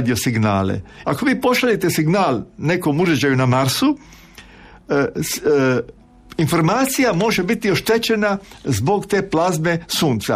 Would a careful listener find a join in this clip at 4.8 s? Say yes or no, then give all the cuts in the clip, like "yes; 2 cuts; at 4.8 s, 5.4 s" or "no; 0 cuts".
no; 1 cut; at 1.0 s